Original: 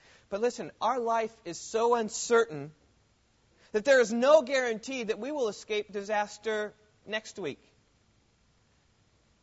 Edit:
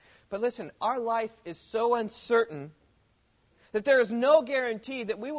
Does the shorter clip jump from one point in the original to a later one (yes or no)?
no